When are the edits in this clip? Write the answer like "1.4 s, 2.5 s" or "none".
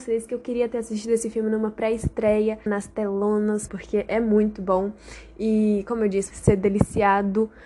2.7 s, 3.7 s, 6.3 s